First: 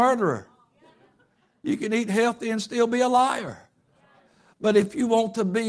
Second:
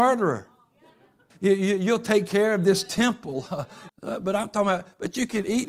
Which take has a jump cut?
second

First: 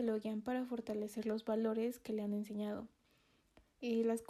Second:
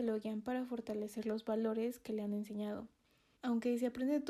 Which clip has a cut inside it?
second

